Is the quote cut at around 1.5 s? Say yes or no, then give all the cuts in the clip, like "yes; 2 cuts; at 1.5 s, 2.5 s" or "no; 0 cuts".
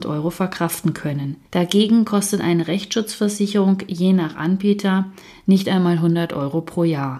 yes; 1 cut; at 1.5 s